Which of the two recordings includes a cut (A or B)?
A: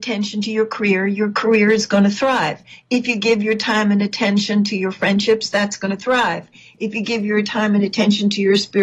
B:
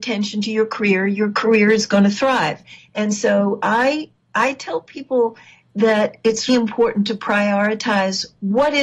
B